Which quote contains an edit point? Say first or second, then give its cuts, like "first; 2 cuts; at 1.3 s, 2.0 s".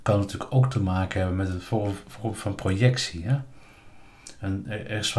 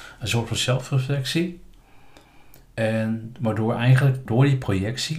second; 1 cut; at 4.3 s